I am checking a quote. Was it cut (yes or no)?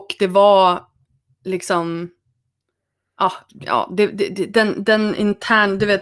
yes